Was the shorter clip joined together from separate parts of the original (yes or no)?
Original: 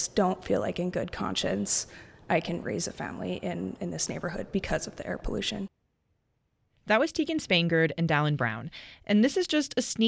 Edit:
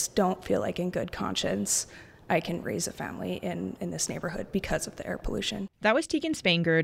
yes